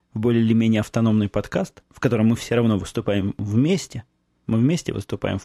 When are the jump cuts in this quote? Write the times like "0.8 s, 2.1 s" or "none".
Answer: none